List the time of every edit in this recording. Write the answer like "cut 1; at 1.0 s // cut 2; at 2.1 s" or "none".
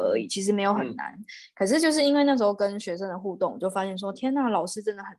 none